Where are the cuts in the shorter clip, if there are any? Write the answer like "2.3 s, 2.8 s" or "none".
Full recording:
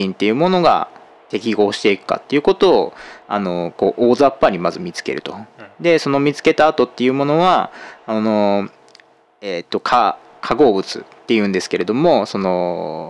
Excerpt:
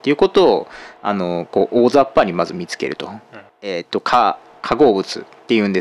3.5 s

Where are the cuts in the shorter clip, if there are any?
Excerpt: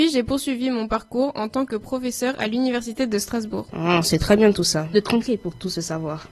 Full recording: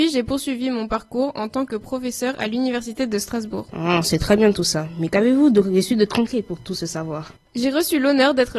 4.9 s

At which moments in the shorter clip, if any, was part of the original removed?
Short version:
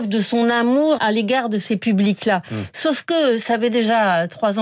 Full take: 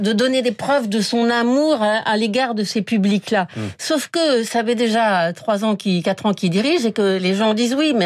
1.0 s

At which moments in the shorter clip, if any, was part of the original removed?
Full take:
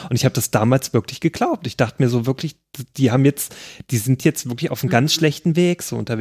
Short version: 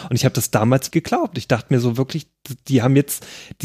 0.9 s

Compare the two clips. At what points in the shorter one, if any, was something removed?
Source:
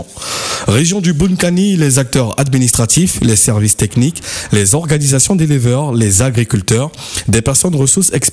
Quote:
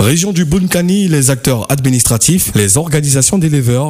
2.5 s

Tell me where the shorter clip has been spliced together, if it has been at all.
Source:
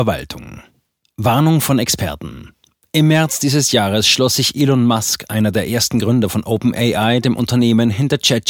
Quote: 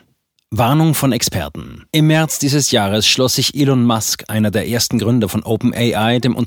1.9 s

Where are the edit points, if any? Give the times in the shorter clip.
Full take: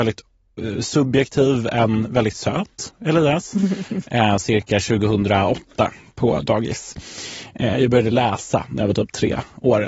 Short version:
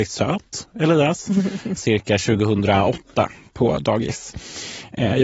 1.8 s

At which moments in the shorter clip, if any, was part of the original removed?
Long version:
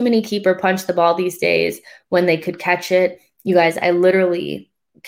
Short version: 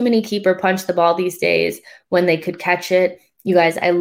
none

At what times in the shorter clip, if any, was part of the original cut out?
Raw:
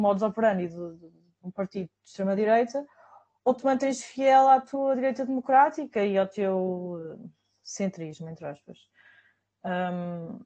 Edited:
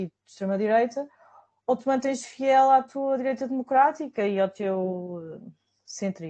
none

